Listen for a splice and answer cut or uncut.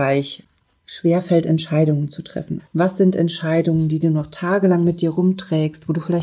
cut